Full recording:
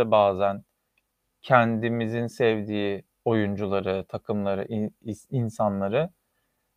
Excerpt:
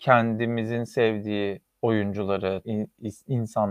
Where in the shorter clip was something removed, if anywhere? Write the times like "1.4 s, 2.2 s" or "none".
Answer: 2.6 s

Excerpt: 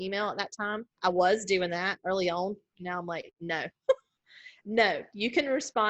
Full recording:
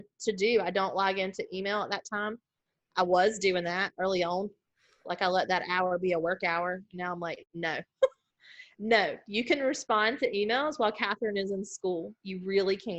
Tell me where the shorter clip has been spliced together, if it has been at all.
0.9 s, 2.7 s

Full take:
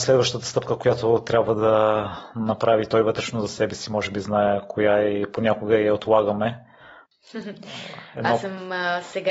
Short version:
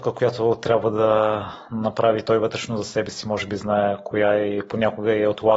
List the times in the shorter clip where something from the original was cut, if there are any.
none

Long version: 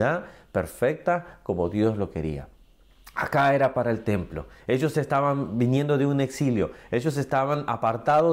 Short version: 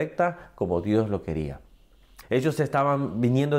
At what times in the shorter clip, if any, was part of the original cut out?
2.2 s

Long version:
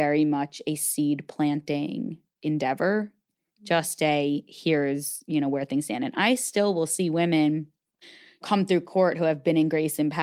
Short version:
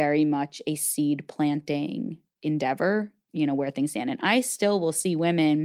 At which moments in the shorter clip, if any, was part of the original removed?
3.3 s

